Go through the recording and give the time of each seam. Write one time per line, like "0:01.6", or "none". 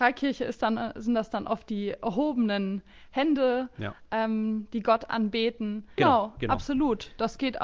0:06.0